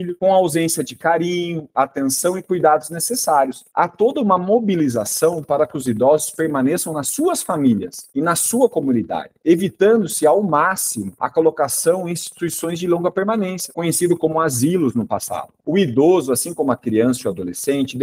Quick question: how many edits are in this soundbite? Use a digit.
2